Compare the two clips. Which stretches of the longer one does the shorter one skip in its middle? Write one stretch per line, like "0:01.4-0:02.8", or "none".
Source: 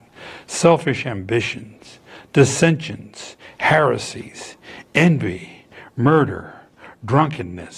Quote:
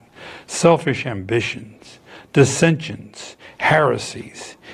none